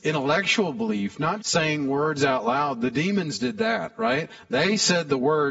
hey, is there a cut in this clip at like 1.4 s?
yes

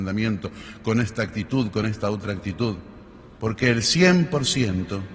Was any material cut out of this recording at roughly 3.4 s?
yes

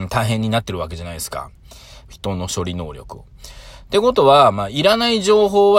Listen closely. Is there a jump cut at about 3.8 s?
no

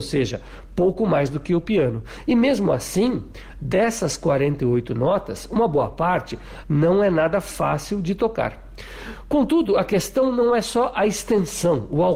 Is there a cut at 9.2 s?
no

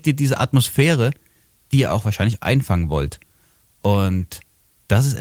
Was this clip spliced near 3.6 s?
no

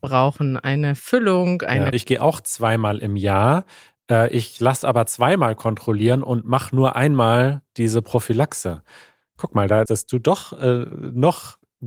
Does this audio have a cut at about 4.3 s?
no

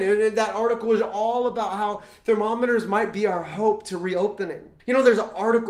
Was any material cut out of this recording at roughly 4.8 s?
yes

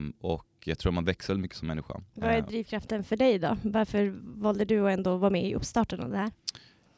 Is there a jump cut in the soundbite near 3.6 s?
no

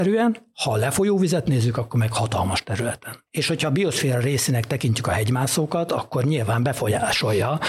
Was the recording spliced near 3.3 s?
yes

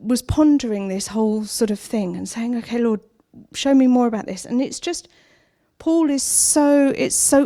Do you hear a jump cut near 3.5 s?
yes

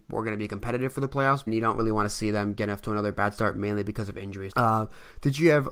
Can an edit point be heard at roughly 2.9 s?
no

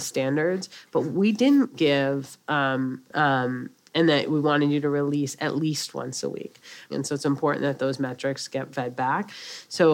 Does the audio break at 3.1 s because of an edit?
yes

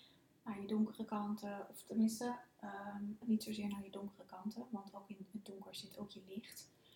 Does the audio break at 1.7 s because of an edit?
no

